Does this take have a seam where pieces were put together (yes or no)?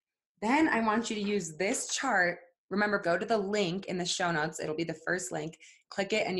yes